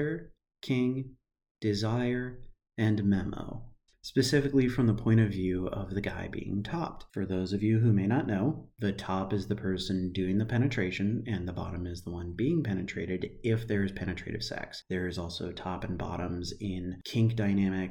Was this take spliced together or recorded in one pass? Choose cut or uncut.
cut